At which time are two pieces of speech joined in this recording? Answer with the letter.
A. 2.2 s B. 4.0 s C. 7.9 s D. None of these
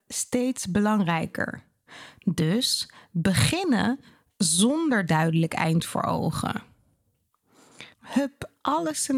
C